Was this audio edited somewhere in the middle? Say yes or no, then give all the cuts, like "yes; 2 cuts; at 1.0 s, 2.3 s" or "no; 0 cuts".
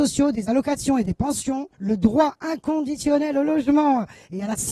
yes; 1 cut; at 1.7 s